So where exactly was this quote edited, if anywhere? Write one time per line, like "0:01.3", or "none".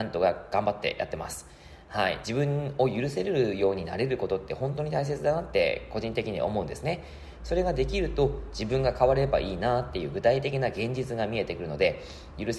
none